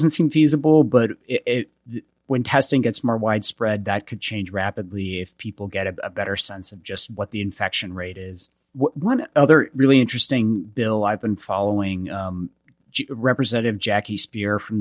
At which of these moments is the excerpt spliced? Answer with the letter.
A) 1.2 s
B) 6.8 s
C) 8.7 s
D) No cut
C